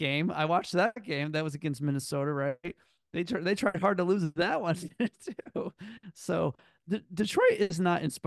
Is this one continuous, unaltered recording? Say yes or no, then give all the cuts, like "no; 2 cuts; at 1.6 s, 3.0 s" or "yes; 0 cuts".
yes; 0 cuts